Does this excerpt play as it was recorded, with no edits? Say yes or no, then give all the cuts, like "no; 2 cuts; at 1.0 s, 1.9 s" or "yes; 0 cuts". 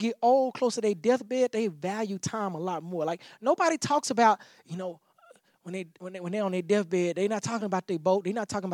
yes; 0 cuts